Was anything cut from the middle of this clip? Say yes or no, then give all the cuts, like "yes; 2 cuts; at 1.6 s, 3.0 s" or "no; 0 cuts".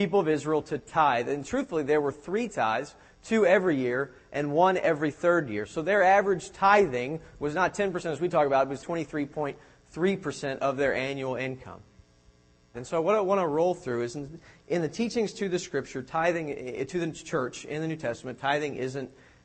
yes; 2 cuts; at 8.8 s, 12.7 s